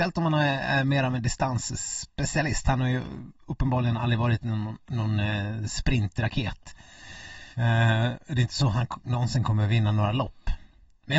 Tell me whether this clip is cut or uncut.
cut